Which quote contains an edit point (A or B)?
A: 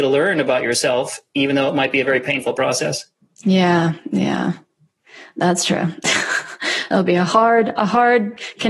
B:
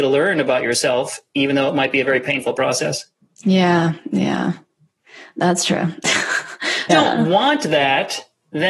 B